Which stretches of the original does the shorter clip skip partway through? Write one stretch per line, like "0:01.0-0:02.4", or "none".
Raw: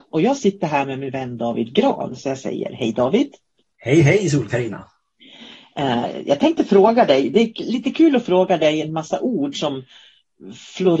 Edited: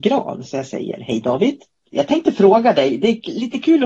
0:03.6-0:06.2